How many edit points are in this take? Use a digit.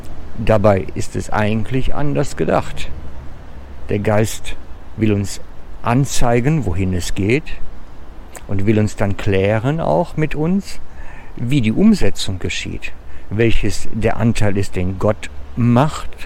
0